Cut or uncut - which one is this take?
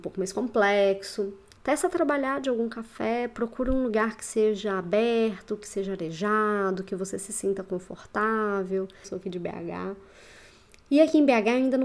cut